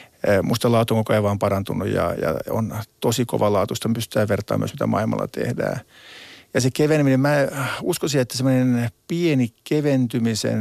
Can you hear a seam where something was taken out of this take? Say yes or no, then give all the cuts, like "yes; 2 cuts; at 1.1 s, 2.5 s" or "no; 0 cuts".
no; 0 cuts